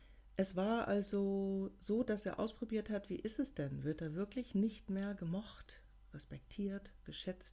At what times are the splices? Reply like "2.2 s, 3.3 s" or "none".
none